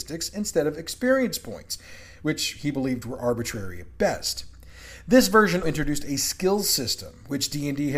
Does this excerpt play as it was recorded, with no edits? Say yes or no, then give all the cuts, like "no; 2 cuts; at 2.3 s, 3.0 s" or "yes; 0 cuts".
no; 1 cut; at 5.6 s